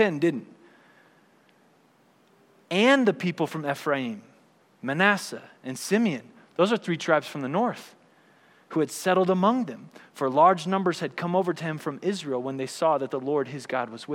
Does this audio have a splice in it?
no; 0 cuts

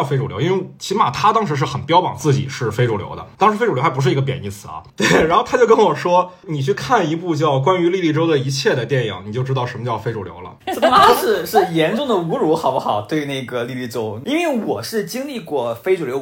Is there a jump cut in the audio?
yes; 1 cut; at 10.6 s

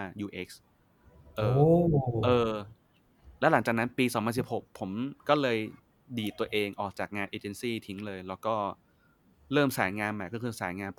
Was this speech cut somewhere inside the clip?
no; 0 cuts

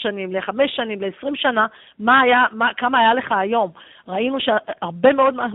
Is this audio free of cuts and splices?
yes; 0 cuts

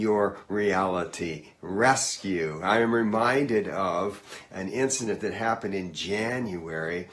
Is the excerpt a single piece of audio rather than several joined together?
yes; 0 cuts

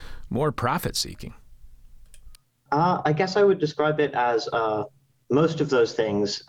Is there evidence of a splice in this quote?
no; 0 cuts

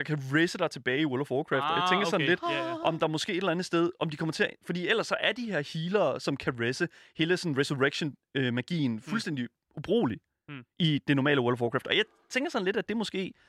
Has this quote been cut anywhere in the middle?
no; 0 cuts

